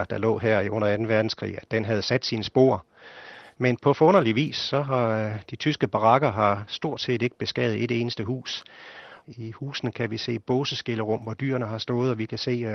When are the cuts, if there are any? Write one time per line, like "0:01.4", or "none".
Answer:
0:03.5
0:09.2